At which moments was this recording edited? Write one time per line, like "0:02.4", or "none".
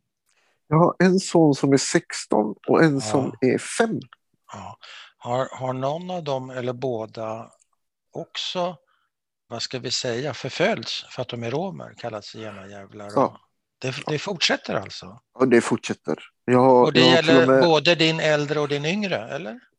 0:09.5